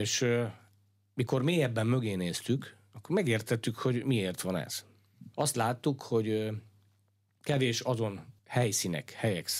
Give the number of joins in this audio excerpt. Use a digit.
2